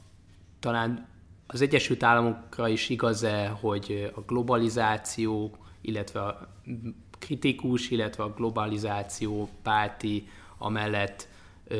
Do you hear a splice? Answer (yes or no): no